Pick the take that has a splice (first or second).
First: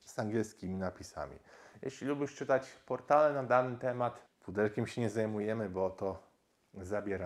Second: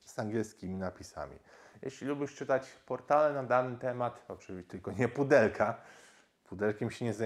first